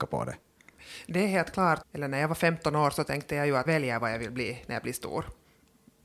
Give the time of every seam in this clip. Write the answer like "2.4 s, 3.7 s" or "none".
1.8 s, 3.7 s